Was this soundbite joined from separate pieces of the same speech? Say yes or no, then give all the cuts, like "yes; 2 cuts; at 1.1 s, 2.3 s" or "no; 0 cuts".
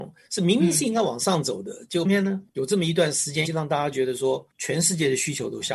yes; 2 cuts; at 2.0 s, 3.4 s